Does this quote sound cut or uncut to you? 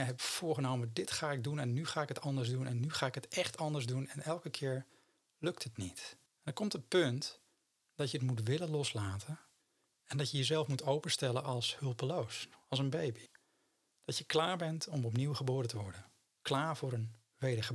cut